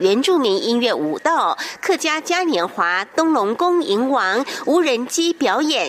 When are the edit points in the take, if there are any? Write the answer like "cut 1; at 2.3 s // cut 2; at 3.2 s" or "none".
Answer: none